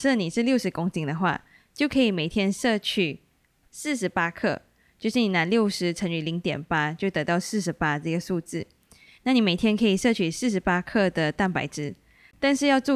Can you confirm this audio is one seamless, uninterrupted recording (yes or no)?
yes